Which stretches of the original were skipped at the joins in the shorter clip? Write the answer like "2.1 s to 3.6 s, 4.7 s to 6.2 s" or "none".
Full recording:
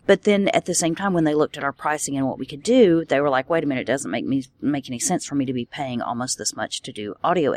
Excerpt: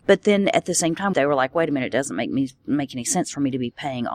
1.1 s to 3.1 s

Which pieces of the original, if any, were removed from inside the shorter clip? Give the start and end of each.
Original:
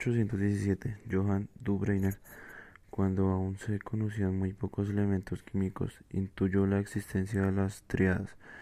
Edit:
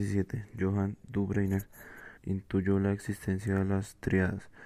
2.7 s to 6.0 s

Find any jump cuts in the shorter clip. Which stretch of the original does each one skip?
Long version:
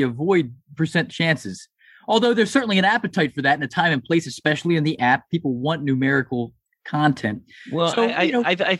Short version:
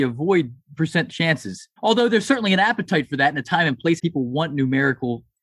1.8 s to 2.0 s, 4.2 s to 5.3 s

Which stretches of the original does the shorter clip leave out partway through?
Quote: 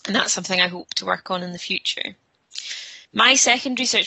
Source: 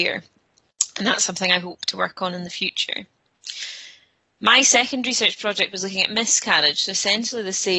4.0 s to 4.3 s

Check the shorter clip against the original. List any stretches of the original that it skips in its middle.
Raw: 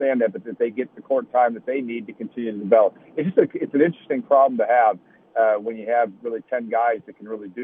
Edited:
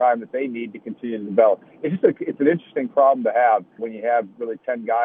5.1 s to 5.6 s

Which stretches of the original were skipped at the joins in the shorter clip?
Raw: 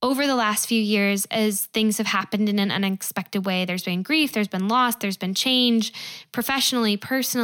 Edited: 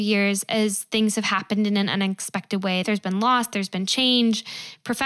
3.6 s to 4.3 s

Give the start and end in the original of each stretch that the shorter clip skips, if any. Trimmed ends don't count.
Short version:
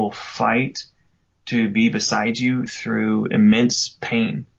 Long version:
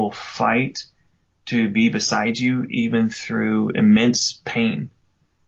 2.7 s to 3.1 s

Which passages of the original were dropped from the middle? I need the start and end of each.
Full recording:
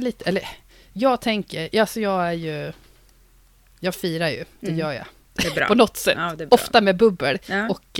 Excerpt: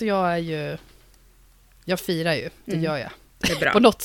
none

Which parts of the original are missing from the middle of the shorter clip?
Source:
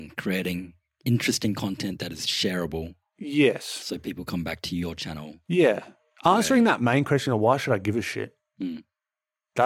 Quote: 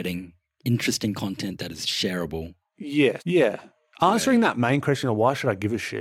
3.6 s to 5.4 s

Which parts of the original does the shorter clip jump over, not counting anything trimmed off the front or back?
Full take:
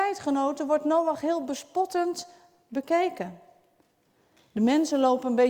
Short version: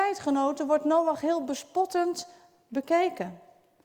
none

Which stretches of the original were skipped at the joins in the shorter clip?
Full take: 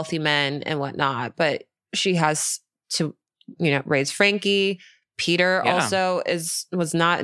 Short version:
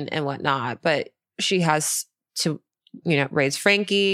none

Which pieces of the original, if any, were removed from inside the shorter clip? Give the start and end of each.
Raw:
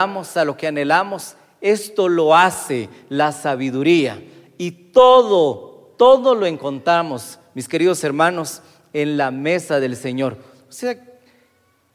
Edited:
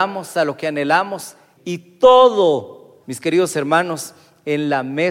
1.6 s to 4.5 s, 6.0 s to 7.5 s

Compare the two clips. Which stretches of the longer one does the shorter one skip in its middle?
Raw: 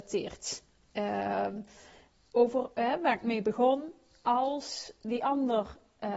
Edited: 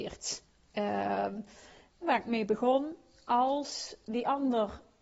2.2 s to 3.0 s

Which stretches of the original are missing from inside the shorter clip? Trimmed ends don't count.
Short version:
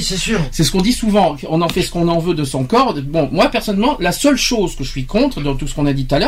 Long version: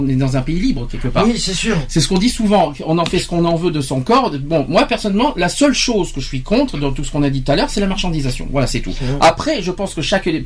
none

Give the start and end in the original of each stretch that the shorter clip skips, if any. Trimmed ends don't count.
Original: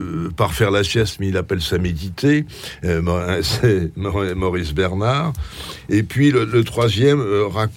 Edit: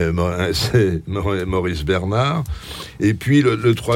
none

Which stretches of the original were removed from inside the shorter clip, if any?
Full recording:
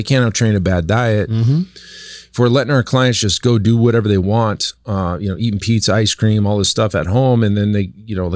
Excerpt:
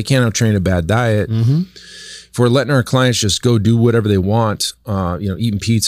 none

